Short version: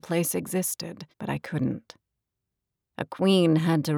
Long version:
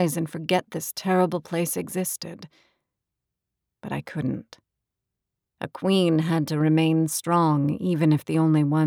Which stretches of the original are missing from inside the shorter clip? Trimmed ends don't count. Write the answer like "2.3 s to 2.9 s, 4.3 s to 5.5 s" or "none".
2.5 s to 3.7 s